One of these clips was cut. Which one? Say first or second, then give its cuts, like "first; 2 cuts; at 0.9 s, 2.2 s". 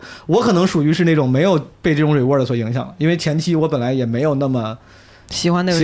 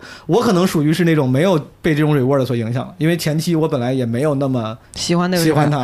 second; 1 cut; at 4.8 s